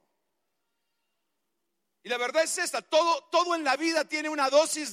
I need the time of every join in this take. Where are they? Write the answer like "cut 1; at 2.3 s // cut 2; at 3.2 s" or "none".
none